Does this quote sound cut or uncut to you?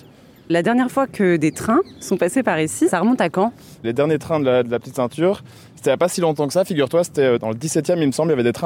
uncut